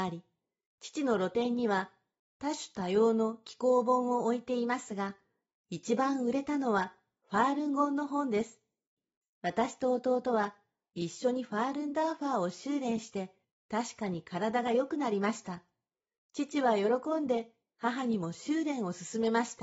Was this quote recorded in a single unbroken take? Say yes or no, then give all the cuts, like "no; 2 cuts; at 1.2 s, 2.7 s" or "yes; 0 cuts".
yes; 0 cuts